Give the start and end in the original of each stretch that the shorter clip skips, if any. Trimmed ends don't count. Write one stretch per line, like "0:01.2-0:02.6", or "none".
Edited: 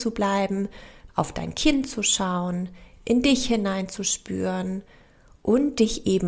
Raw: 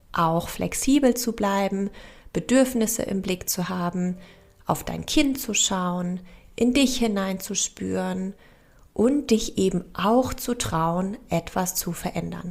0:02.3-0:04.6